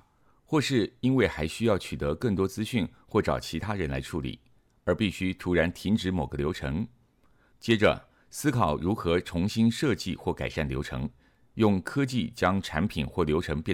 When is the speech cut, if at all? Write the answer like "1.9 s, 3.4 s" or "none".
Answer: 7.5 s